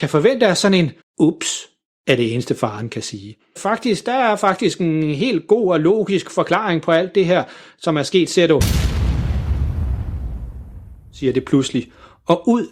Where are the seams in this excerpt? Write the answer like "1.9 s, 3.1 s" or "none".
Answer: 1.0 s, 3.6 s